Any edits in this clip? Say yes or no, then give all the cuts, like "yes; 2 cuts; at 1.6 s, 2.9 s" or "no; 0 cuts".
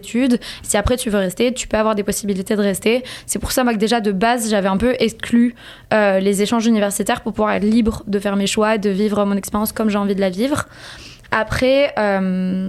no; 0 cuts